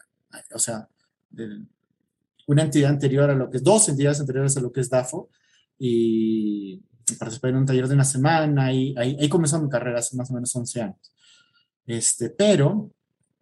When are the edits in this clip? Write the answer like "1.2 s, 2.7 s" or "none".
none